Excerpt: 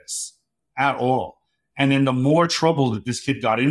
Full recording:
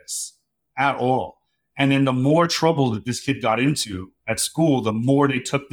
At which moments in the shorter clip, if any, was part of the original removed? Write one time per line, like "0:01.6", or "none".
none